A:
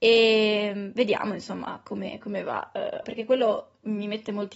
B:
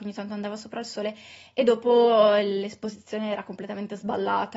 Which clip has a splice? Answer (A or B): A